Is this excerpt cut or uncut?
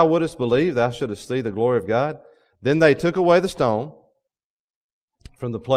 uncut